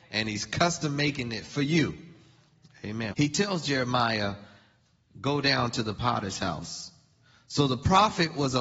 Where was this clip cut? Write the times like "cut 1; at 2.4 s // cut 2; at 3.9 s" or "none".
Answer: cut 1; at 3.1 s